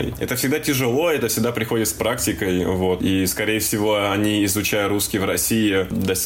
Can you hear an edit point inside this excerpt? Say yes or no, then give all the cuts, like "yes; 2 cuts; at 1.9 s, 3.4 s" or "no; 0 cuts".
no; 0 cuts